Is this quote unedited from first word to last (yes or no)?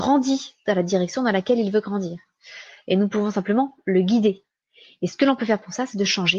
yes